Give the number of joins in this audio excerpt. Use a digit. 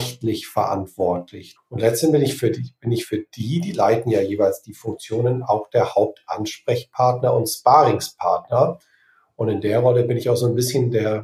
1